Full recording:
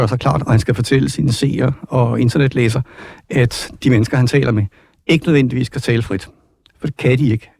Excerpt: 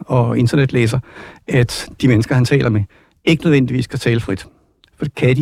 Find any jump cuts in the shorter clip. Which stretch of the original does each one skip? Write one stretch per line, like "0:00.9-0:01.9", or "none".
none